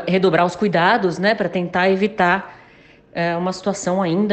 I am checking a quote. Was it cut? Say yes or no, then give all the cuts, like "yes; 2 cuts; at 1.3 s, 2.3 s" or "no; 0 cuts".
no; 0 cuts